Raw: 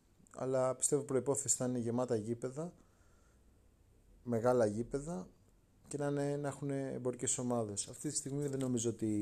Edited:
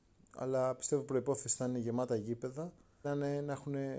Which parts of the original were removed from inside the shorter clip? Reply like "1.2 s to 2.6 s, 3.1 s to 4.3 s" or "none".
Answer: 3.0 s to 6.0 s